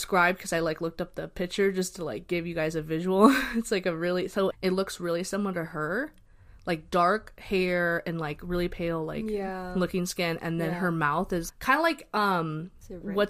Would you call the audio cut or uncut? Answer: cut